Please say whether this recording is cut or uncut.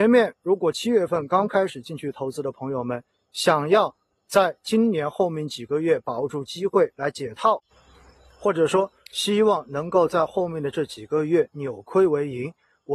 uncut